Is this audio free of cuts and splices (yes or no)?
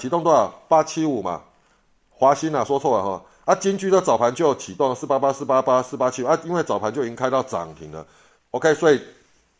yes